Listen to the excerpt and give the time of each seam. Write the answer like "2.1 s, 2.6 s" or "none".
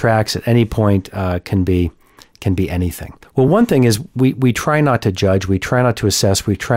none

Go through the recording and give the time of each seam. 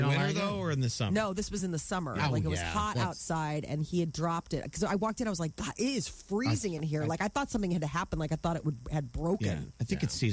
none

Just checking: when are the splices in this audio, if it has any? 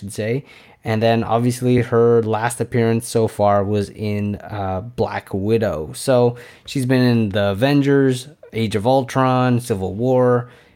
none

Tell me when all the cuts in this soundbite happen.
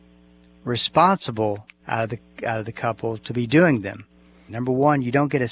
4.5 s

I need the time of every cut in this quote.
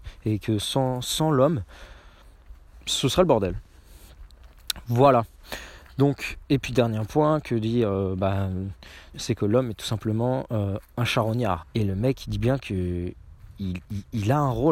6.4 s, 9.1 s, 11.6 s

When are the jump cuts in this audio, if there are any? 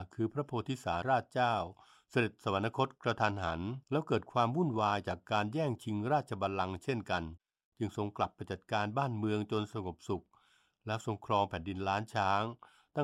1.0 s, 3.8 s

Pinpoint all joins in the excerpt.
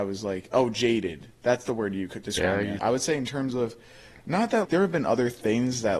2.8 s, 4.6 s

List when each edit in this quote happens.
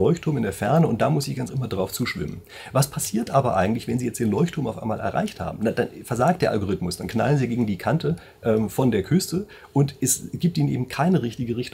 1.5 s

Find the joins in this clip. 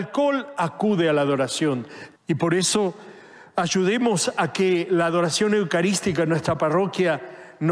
2.2 s

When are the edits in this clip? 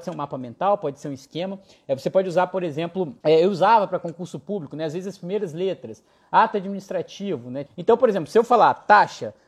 3.2 s, 7.7 s

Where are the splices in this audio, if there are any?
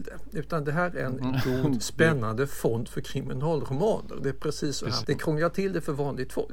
5.0 s

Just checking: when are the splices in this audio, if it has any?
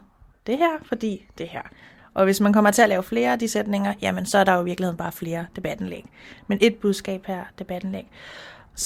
2.0 s

